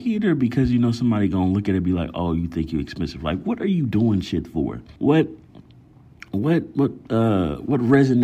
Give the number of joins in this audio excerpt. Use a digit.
1